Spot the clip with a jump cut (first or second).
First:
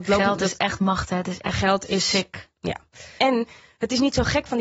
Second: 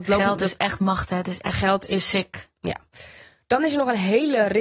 first